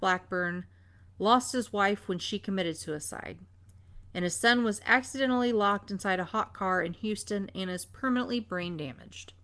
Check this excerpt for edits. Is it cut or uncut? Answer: uncut